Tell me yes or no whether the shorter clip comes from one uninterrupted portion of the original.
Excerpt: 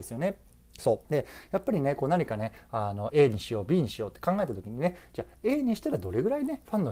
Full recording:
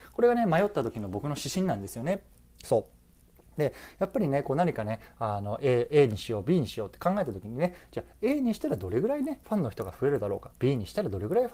no